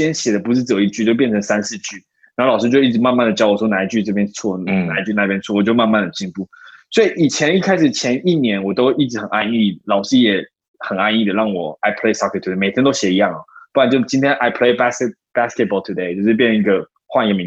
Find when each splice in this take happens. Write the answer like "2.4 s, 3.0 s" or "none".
none